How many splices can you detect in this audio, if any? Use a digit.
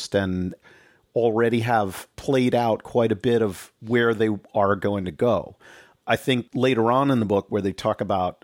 0